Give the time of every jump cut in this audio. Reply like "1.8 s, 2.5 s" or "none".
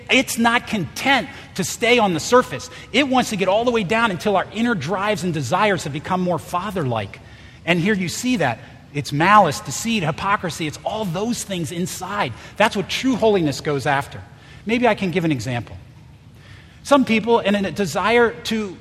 none